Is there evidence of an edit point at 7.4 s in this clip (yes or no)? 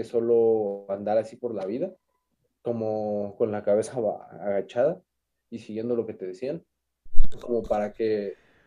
no